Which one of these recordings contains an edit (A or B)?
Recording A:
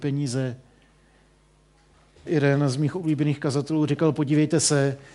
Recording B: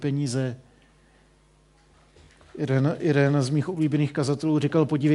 A